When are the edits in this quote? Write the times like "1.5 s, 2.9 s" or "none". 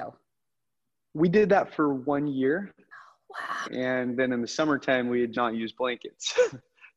3.6 s, 5.3 s